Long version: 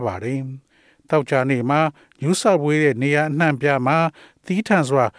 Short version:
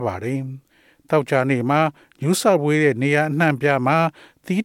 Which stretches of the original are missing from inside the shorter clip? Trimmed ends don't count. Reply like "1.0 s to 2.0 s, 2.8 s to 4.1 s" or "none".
none